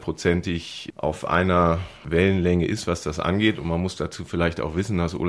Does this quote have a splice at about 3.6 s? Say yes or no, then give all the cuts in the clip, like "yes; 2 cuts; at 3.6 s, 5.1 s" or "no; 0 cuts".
no; 0 cuts